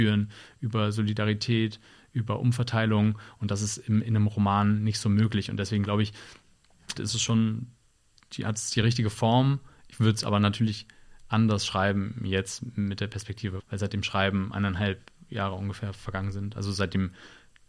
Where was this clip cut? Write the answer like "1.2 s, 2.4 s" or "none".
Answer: 7.0 s, 13.6 s